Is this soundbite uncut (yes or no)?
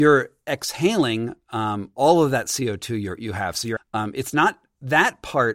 no